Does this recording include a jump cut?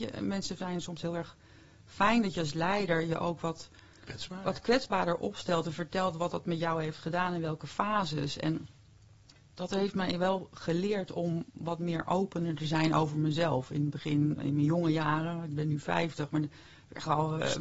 no; 0 cuts

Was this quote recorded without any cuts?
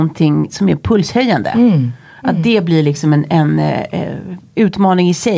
yes; 0 cuts

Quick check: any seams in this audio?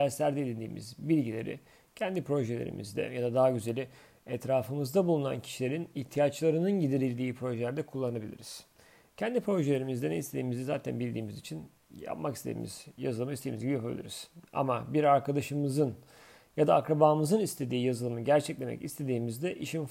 no; 0 cuts

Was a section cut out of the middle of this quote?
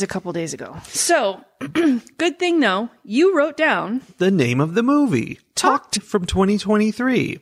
yes; 1 cut; at 6.0 s

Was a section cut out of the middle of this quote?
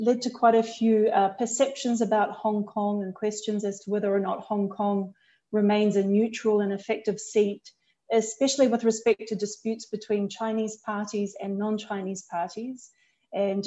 no; 0 cuts

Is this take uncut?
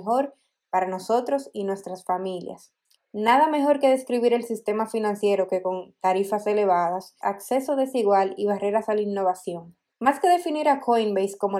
no; 3 cuts; at 2.9 s, 7.2 s, 9.9 s

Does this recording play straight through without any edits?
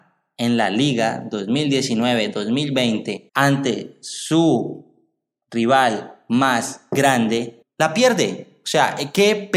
no; 2 cuts; at 3.3 s, 7.6 s

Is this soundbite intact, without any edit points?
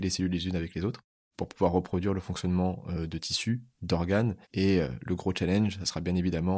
no; 1 cut; at 4.4 s

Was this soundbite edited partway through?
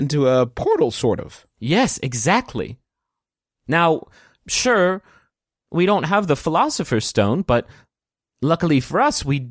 no; 0 cuts

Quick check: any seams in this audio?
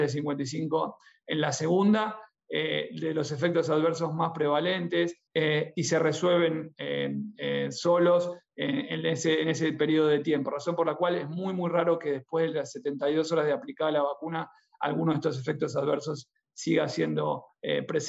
yes; 1 cut; at 5.3 s

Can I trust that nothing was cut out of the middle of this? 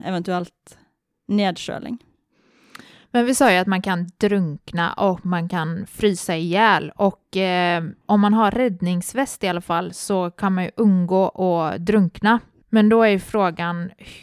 no; 2 cuts; at 8.0 s, 12.6 s

